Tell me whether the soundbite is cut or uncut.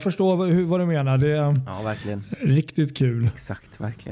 cut